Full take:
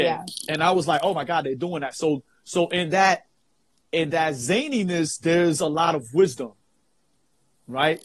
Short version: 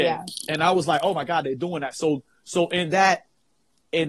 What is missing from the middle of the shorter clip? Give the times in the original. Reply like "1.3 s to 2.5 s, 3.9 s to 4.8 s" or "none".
none